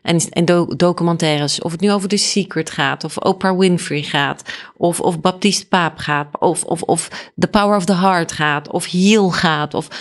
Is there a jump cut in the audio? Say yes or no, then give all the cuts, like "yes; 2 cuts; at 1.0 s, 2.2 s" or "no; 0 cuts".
no; 0 cuts